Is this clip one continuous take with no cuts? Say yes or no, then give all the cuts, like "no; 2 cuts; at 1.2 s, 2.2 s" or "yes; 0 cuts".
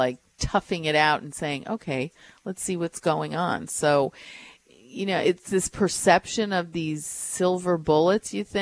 yes; 0 cuts